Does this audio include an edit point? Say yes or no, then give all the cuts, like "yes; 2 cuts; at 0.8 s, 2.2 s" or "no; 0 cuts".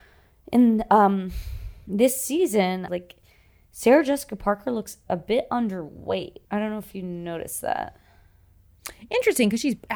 yes; 2 cuts; at 2.9 s, 6.4 s